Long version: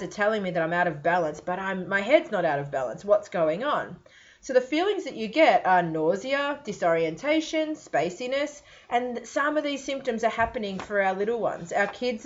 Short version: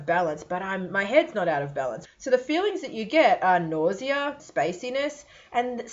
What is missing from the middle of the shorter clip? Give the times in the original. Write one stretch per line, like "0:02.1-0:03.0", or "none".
0:03.0-0:04.3
0:06.6-0:07.8